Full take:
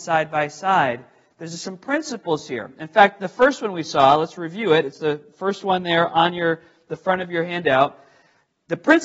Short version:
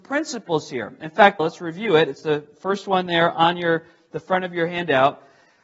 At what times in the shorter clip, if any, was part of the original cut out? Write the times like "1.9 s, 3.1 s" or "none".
1.4 s

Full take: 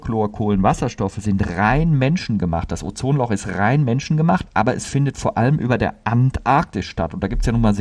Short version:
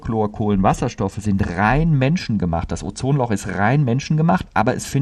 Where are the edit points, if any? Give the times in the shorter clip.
none

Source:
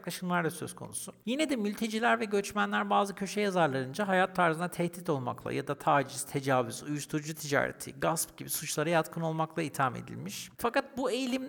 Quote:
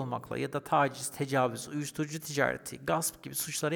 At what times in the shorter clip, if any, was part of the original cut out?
none

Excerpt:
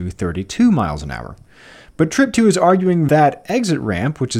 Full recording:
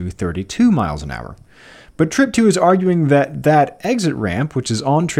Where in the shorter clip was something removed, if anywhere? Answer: 3.1 s

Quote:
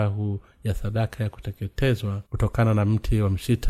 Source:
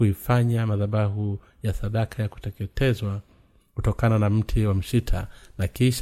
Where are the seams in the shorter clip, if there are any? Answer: 2.3 s

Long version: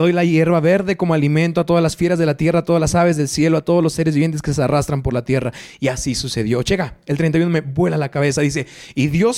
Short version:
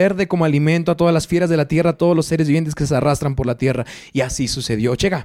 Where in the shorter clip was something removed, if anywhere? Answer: 1.9 s

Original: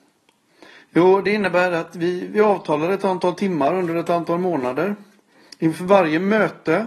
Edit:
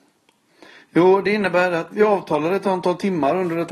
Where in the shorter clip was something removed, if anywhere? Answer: 1.9 s

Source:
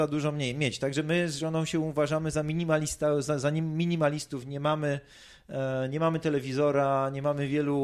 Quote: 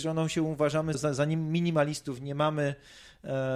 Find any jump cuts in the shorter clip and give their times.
0.9 s

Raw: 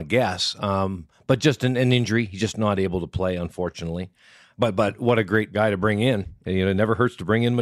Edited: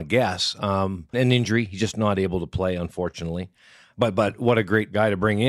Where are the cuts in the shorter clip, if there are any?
1.1 s

